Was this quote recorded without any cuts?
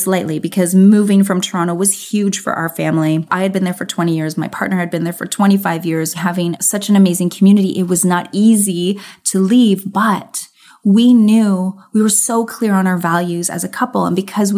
yes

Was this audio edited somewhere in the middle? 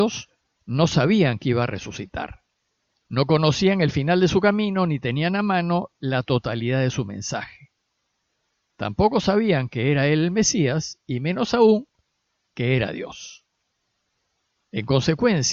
no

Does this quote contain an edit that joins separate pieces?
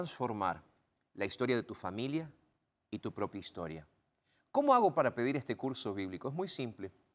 yes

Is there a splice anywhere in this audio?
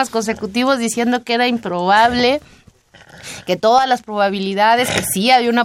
no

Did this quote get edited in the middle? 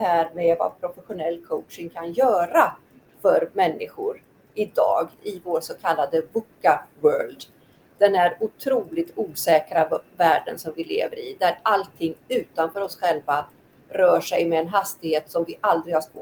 yes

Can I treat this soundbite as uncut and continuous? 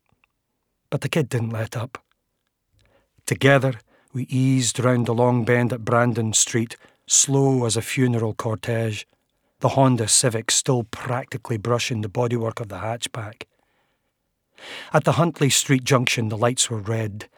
yes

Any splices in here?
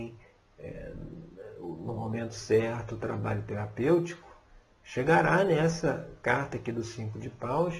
no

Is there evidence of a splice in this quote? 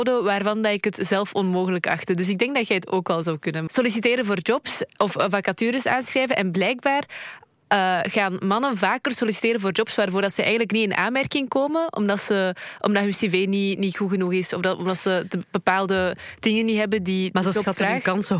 yes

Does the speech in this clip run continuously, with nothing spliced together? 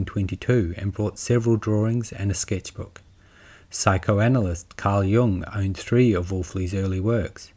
yes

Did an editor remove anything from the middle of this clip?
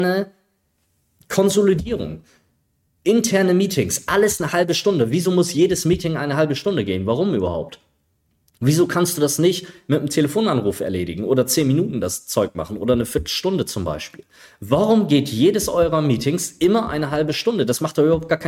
no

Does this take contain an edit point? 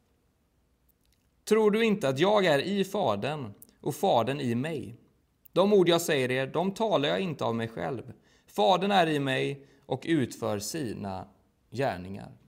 no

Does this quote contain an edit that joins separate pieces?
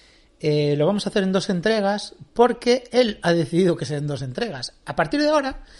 no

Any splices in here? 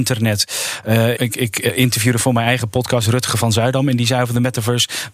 yes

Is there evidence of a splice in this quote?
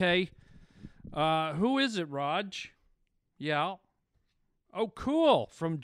no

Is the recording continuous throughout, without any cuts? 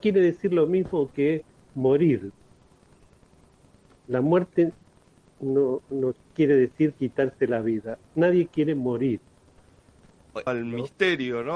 no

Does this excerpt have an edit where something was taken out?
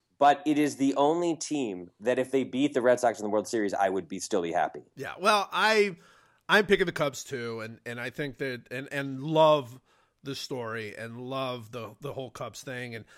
yes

